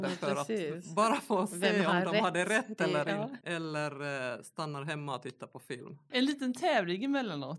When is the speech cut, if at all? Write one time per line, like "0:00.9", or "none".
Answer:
0:03.4
0:06.1

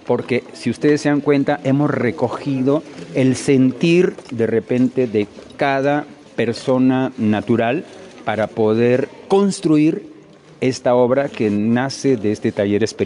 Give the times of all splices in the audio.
none

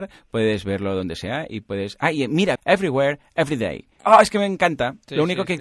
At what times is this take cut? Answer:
0:02.6
0:04.0

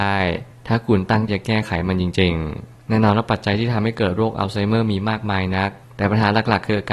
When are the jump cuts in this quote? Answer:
0:01.3

